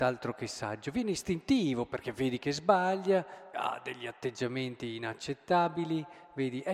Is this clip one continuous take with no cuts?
no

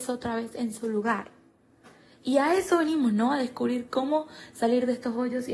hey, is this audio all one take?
yes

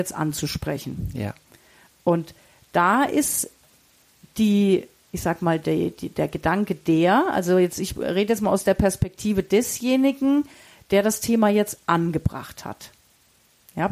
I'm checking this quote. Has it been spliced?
no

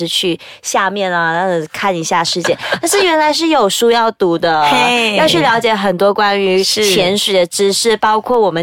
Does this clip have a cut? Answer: no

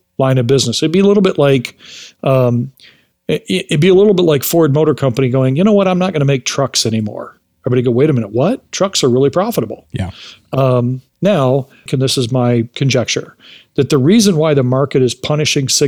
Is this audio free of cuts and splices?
no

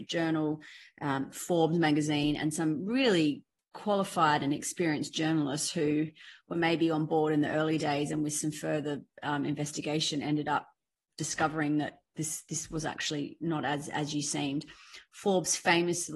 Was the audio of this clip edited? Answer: no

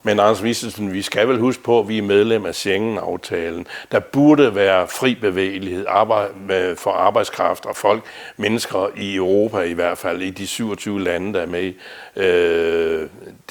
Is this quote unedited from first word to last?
yes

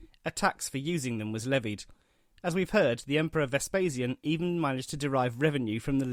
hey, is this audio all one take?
yes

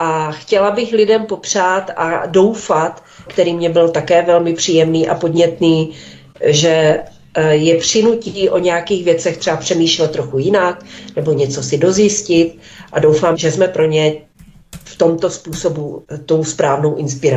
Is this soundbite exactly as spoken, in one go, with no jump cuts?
no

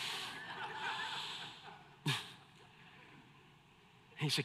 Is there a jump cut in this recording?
no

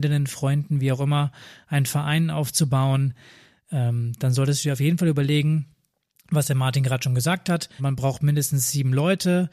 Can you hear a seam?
yes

